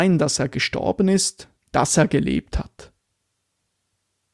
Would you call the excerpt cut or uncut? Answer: cut